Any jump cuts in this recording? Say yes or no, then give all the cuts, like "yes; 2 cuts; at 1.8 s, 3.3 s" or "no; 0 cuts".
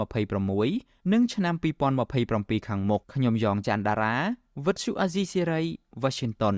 yes; 1 cut; at 3.0 s